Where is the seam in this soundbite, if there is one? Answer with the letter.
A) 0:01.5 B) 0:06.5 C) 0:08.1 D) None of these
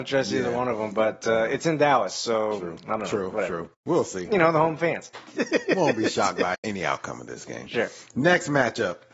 B